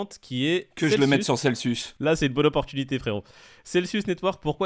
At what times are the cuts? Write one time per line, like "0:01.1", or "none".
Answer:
none